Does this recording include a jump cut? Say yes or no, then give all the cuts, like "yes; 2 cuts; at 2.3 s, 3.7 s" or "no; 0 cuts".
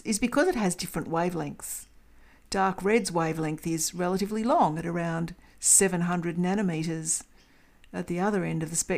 no; 0 cuts